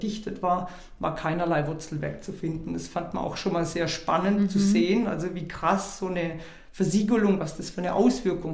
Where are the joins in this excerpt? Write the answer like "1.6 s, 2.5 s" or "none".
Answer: none